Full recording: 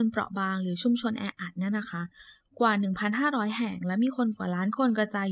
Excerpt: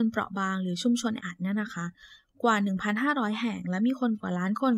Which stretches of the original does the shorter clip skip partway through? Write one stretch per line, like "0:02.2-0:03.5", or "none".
0:01.2-0:01.3